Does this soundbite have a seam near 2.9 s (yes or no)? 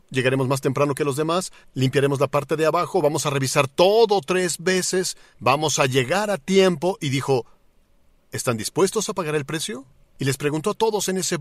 no